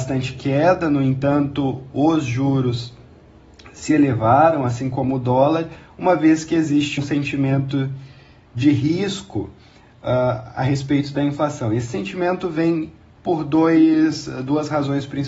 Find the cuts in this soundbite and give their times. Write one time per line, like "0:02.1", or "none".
0:07.0